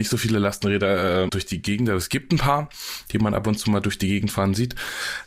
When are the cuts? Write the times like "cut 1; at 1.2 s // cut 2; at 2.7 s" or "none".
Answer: cut 1; at 1.3 s